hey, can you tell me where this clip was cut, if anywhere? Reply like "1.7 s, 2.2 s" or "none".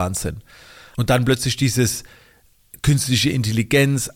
0.9 s